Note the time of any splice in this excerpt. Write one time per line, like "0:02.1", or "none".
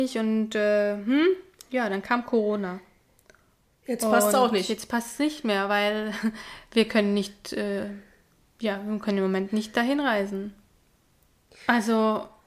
none